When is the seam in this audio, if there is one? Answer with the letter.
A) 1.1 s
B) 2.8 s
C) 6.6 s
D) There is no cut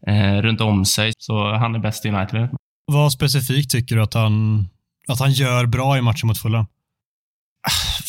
A